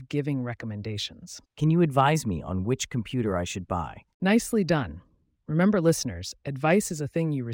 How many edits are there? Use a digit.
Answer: 2